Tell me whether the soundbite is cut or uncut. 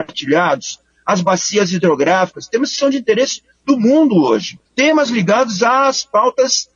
cut